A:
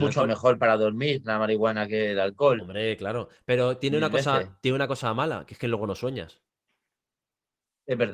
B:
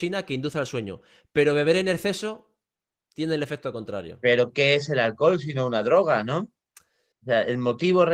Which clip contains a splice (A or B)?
B